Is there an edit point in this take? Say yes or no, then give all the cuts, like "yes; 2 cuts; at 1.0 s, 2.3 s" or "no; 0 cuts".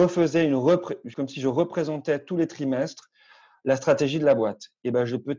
no; 0 cuts